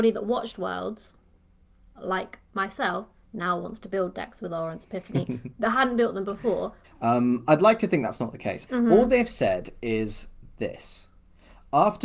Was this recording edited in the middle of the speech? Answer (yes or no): yes